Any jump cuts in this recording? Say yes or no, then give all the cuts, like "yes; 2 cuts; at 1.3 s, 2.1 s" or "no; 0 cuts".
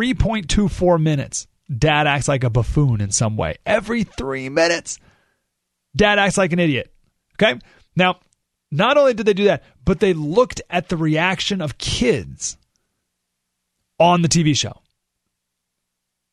no; 0 cuts